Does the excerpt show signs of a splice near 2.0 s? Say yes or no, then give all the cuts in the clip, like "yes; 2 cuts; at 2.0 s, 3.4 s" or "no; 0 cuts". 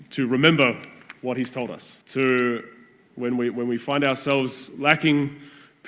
yes; 1 cut; at 2.0 s